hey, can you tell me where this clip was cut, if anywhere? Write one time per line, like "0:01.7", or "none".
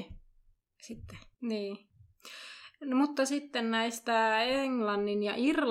0:01.3